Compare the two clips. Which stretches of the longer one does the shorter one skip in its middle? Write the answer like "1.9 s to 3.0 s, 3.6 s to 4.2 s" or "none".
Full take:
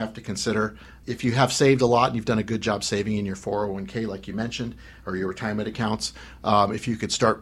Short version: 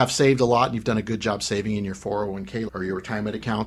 4.1 s to 5.0 s